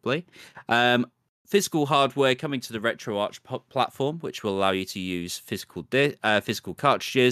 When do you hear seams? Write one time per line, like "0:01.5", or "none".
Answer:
none